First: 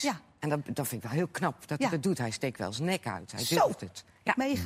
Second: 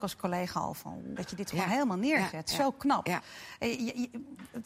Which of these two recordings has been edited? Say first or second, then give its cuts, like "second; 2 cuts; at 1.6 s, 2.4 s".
second; 1 cut; at 1.2 s